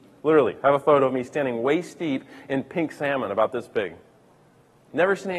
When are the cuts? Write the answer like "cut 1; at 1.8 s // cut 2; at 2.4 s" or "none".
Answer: none